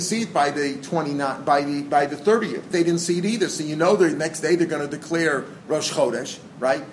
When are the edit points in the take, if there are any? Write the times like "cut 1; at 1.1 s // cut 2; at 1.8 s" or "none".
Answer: cut 1; at 2.7 s